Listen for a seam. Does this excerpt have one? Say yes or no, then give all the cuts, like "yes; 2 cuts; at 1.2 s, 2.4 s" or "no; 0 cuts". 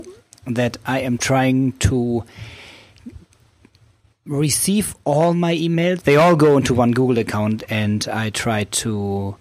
yes; 1 cut; at 6.0 s